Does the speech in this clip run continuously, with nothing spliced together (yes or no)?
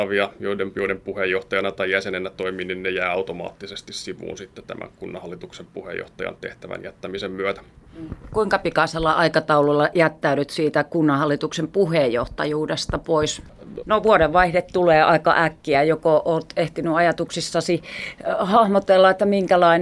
no